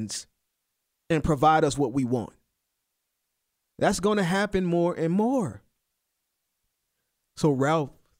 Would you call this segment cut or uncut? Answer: cut